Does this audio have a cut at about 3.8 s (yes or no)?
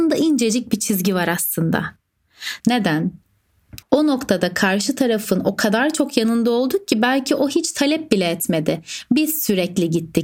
yes